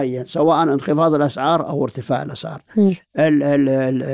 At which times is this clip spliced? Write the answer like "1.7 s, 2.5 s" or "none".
none